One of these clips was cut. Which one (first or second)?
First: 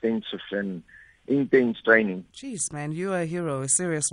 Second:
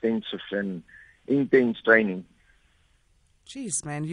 first